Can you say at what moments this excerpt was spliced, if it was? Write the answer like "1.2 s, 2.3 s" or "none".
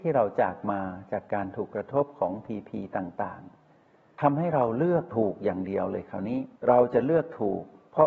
6.6 s